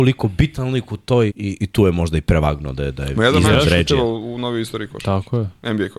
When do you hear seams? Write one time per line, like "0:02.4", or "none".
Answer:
0:01.3